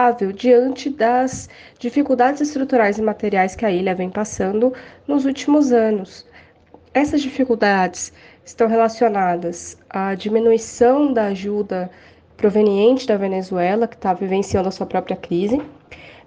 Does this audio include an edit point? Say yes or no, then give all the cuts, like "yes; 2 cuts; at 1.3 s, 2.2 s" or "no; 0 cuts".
no; 0 cuts